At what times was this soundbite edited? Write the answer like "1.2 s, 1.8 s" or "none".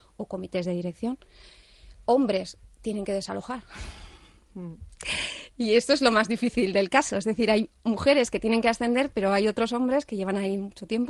none